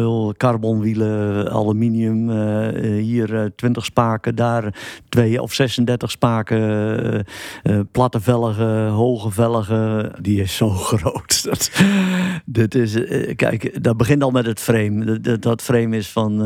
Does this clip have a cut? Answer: yes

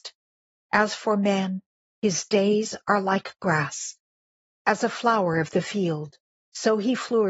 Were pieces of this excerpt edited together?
no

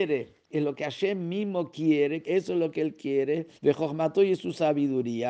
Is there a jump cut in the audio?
yes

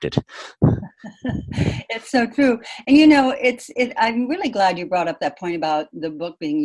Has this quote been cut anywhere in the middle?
no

